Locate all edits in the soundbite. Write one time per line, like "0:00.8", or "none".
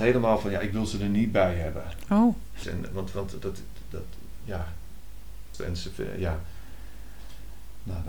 0:02.6
0:05.5